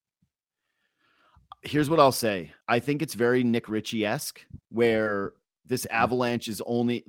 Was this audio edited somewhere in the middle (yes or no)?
yes